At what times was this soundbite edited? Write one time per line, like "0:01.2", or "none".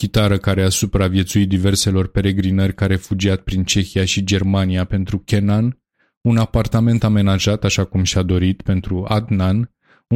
none